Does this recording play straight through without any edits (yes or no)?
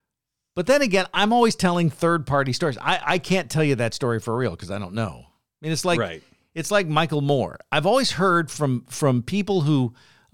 yes